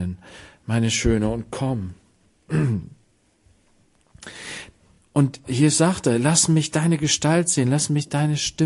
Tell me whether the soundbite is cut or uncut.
uncut